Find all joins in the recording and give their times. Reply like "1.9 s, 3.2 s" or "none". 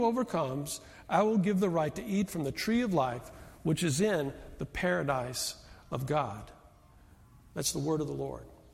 none